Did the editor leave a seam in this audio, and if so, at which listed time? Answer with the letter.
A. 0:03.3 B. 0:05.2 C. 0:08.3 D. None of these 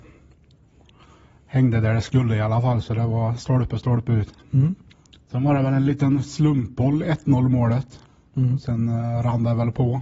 D